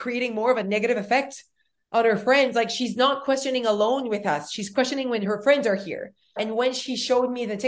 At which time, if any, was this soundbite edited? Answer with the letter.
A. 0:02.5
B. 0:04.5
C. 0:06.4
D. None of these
C